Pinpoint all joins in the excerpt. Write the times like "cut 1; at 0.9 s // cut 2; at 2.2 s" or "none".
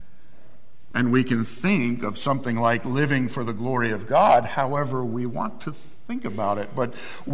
none